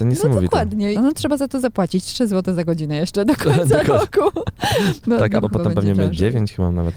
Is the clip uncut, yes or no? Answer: no